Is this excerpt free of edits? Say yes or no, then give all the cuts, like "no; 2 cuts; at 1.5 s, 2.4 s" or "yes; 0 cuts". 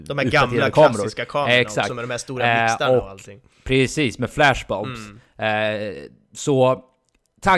yes; 0 cuts